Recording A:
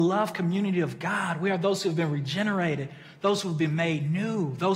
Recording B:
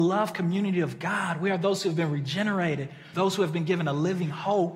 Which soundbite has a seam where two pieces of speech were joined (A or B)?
B